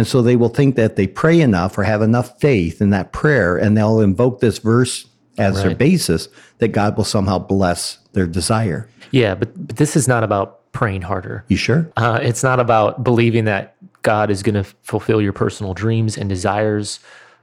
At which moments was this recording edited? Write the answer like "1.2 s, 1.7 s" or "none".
11.9 s